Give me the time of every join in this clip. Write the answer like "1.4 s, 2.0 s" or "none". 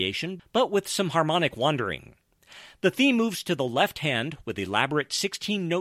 none